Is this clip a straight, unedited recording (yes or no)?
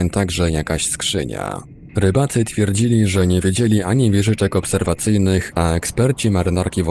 no